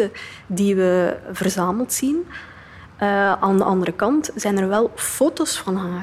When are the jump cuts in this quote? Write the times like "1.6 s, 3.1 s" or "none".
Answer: none